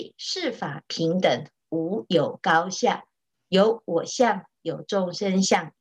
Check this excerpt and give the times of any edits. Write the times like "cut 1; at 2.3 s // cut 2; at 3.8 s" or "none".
cut 1; at 3.3 s // cut 2; at 4.6 s